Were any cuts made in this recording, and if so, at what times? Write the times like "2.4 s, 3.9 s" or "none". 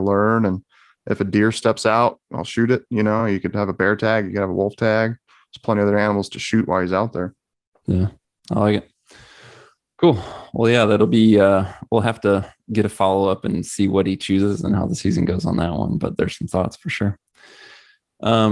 none

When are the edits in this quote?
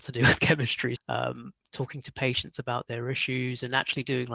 1.0 s

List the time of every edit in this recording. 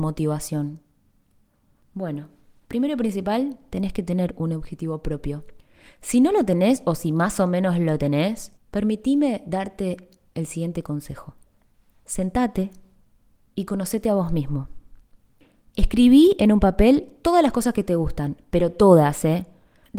none

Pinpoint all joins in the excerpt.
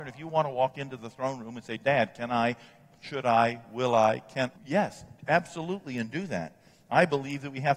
4.6 s

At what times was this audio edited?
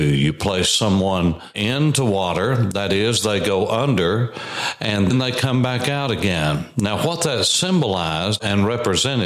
5.1 s

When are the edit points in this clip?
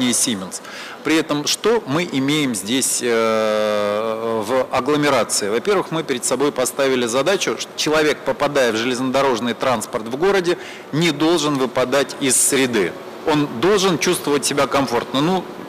none

